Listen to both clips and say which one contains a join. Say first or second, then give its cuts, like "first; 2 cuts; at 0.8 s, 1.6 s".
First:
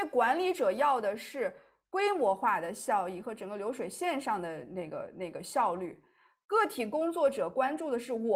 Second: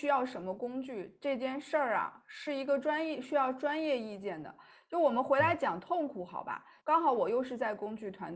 second; 1 cut; at 6.8 s